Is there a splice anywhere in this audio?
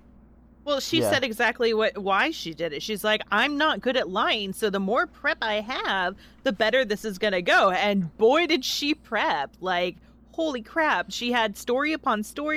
no; 0 cuts

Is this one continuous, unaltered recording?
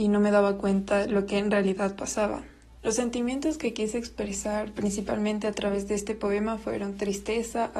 no; 1 cut; at 2.8 s

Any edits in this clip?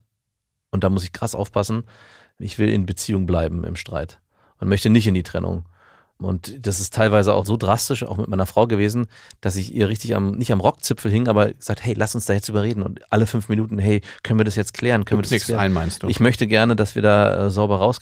no; 0 cuts

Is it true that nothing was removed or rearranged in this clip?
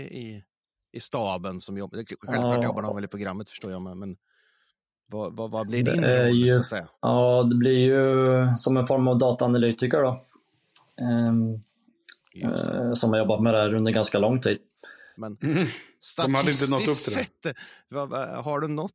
no; 3 cuts; at 6.9 s, 12.2 s, 15.2 s

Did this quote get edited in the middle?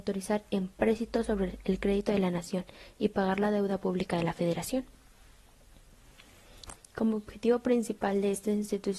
yes; 1 cut; at 6.8 s

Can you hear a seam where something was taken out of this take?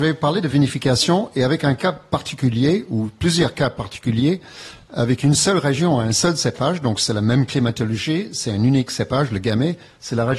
no; 0 cuts

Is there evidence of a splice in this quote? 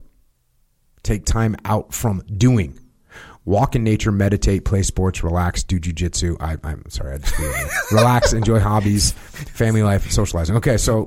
no; 0 cuts

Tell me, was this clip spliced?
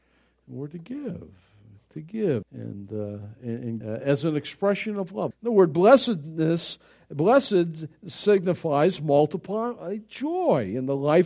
yes; 3 cuts; at 2.4 s, 3.8 s, 5.3 s

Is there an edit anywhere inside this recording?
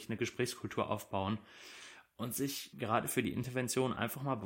yes; 1 cut; at 2.7 s

